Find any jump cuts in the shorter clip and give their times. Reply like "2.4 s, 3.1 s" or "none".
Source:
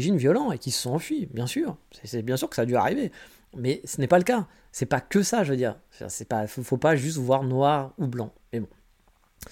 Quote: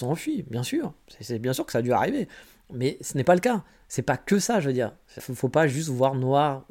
5.2 s